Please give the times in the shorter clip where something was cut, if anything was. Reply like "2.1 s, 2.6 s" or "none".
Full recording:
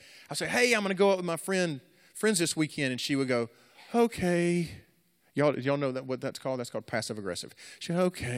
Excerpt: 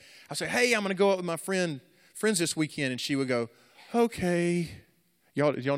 none